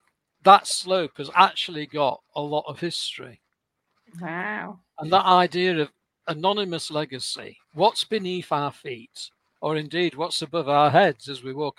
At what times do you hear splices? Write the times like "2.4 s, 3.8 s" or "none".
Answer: none